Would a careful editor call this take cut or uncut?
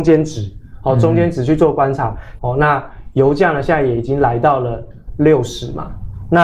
cut